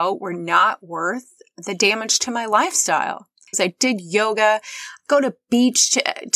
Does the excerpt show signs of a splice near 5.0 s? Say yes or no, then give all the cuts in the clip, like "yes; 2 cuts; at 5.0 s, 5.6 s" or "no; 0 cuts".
no; 1 cut; at 3.5 s